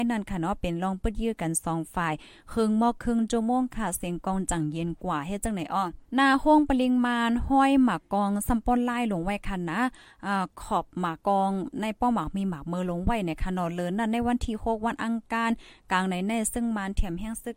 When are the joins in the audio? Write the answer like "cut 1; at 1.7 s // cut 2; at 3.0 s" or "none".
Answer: cut 1; at 6.0 s // cut 2; at 11.2 s